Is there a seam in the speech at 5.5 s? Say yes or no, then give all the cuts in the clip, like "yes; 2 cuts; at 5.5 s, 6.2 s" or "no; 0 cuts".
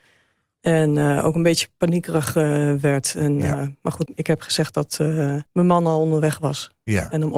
yes; 2 cuts; at 4.1 s, 5.5 s